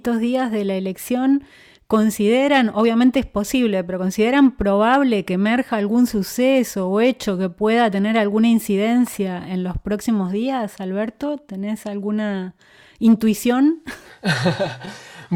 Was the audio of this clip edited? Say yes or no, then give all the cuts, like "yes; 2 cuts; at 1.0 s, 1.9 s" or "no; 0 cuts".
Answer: no; 0 cuts